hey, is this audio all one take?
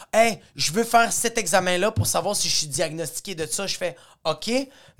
yes; 0 cuts

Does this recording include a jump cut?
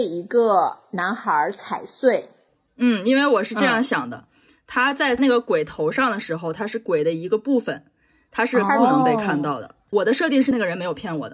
no; 0 cuts

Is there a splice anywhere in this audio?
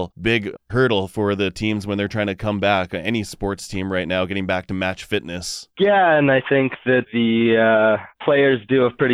no; 0 cuts

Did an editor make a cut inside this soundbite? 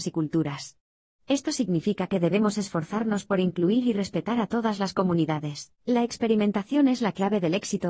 yes; 1 cut; at 5.8 s

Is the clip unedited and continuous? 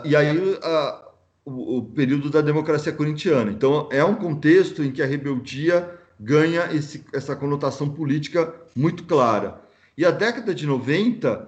yes; 0 cuts

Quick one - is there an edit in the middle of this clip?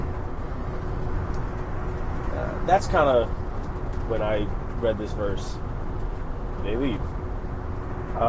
yes; 2 cuts; at 4.1 s, 6.6 s

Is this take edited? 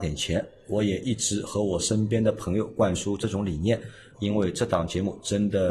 yes; 1 cut; at 4.1 s

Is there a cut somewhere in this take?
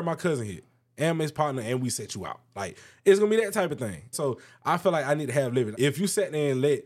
yes; 2 cuts; at 4.1 s, 5.7 s

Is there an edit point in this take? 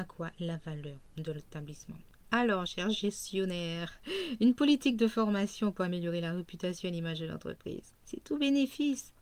no; 0 cuts

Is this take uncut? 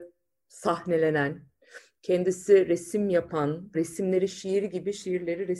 no; 1 cut; at 3.7 s

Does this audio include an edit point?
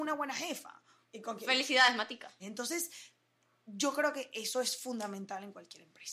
yes; 2 cuts; at 1.0 s, 2.4 s

